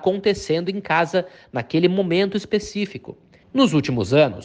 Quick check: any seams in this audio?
yes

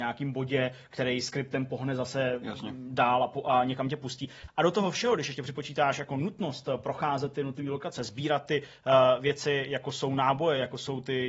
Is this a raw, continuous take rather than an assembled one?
no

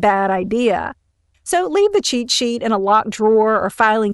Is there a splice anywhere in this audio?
yes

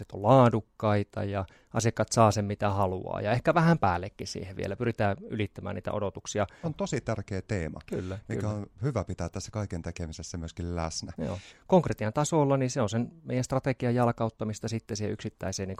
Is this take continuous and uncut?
no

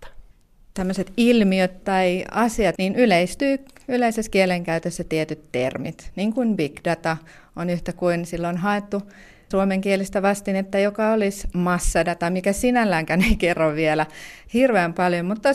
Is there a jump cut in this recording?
yes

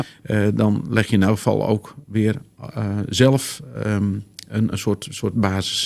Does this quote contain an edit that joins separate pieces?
no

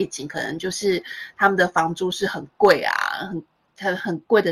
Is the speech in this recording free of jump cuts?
yes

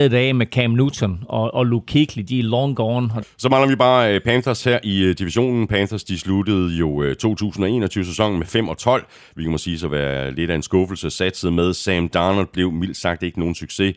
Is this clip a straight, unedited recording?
no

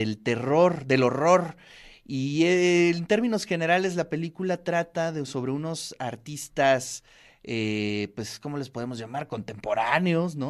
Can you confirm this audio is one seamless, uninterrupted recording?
yes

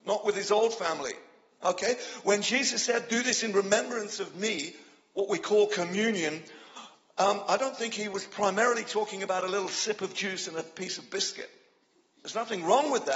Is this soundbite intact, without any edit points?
yes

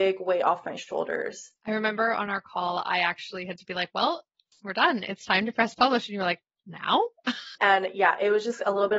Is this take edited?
yes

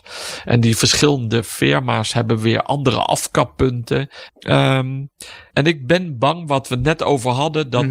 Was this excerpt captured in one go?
no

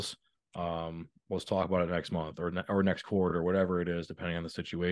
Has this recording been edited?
no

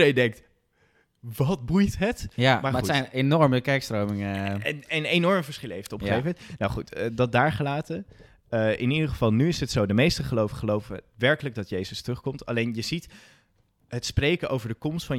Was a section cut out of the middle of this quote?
no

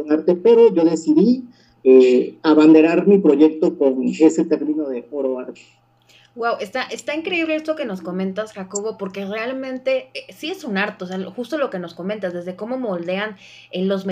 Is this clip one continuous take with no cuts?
yes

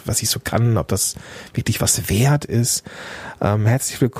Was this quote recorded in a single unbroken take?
yes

